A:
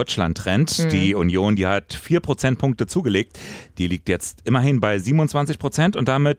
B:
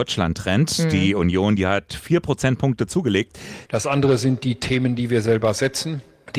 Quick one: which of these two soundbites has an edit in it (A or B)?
B